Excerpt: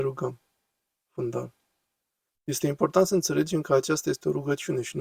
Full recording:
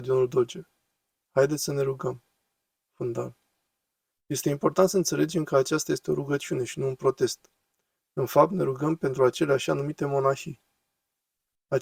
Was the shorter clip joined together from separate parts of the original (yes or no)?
no